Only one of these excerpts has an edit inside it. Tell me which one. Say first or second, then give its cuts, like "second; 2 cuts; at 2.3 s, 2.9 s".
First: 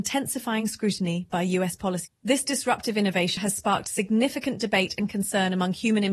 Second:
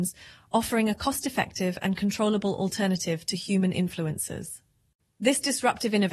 first; 2 cuts; at 2.1 s, 3.4 s